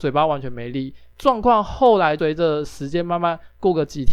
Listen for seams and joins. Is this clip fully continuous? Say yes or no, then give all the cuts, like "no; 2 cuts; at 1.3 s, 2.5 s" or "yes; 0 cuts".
yes; 0 cuts